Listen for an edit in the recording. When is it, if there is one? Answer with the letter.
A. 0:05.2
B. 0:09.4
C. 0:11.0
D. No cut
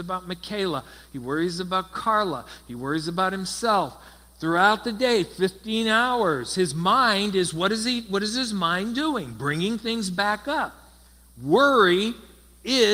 D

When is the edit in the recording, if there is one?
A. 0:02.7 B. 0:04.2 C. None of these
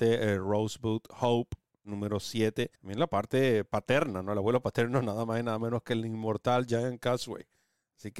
A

